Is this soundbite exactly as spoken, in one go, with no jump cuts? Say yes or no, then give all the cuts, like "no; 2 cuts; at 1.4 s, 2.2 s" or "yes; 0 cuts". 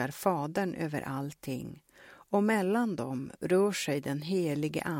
yes; 0 cuts